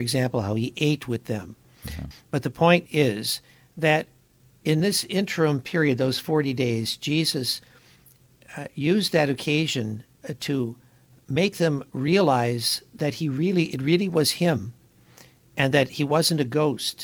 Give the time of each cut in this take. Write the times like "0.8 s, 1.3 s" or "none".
2.1 s